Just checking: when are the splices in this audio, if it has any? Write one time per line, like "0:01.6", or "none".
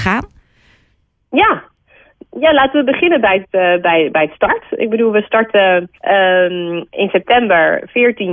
0:05.9